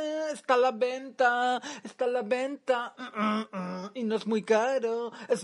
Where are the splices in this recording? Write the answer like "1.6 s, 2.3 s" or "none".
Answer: none